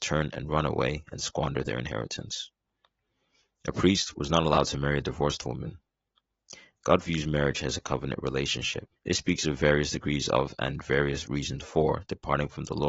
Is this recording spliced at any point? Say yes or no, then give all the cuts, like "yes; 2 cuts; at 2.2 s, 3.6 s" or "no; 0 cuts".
yes; 1 cut; at 9.0 s